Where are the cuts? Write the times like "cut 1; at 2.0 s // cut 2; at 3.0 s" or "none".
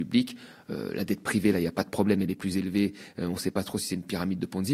none